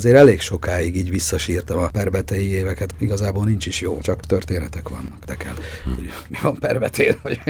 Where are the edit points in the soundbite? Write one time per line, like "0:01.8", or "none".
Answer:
0:02.9
0:04.0
0:05.2